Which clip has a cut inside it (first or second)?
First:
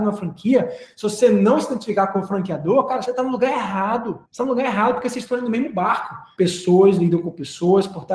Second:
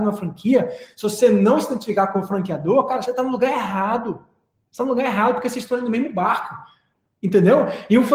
first